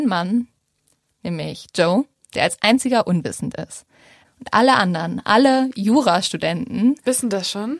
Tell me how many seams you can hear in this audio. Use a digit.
1